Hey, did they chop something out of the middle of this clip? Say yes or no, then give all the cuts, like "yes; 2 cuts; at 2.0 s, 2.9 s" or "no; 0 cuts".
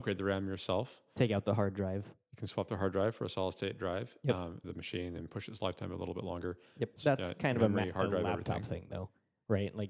yes; 2 cuts; at 4.6 s, 7.0 s